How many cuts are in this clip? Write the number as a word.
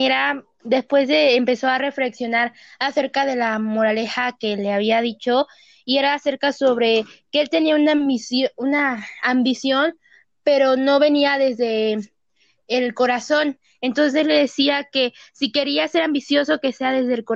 zero